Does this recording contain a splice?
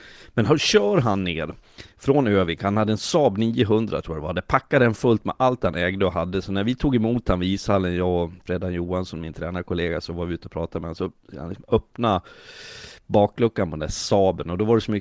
no; 0 cuts

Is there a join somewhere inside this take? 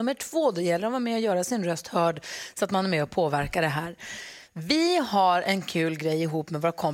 no; 0 cuts

